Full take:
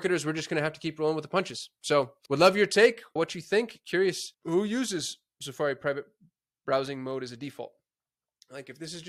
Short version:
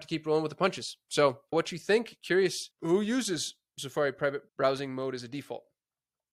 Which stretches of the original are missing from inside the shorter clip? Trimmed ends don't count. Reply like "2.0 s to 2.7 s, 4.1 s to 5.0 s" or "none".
2.2 s to 3.1 s, 6.1 s to 6.6 s